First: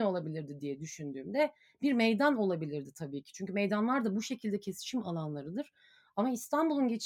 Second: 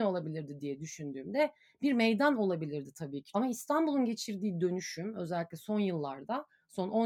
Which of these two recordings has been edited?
second; 1 cut; at 3.3 s

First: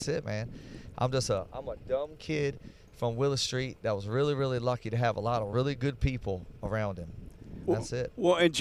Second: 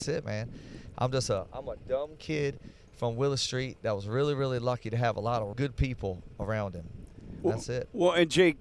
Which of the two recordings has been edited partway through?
second; 1 cut; at 5.5 s

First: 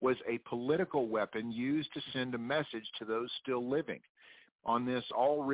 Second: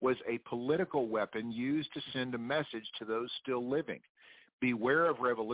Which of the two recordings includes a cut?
first; 1 cut; at 4.5 s

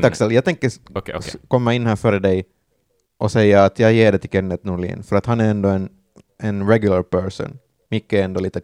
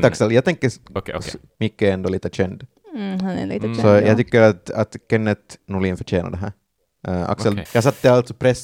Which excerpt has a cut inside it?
second; 2 cuts; at 1.5 s, 7.7 s

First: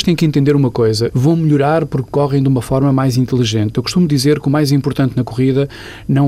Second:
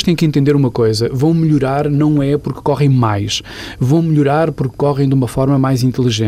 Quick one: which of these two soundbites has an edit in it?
first; 1 cut; at 1.1 s

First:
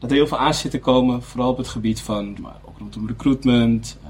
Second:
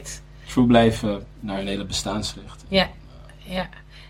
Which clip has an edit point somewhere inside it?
first; 1 cut; at 2.4 s

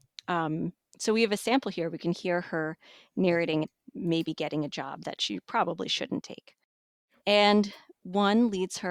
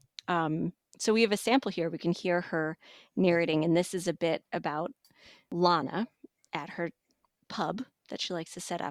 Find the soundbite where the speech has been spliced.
first; 2 cuts; at 3.6 s, 7.2 s

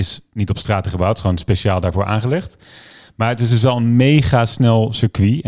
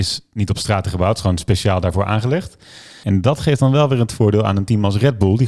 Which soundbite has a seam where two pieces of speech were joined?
second; 1 cut; at 3.0 s

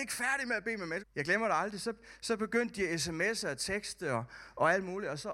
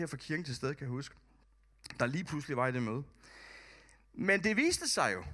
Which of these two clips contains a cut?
first; 1 cut; at 1.0 s

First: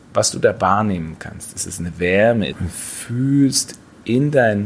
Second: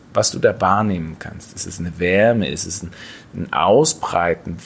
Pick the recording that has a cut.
first; 1 cut; at 2.5 s

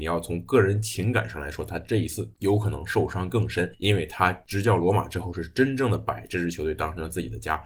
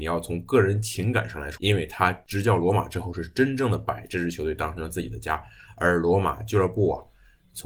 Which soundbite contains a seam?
second; 1 cut; at 1.6 s

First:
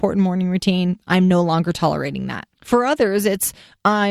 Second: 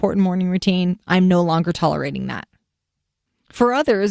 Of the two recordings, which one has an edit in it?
first; 1 cut; at 2.5 s

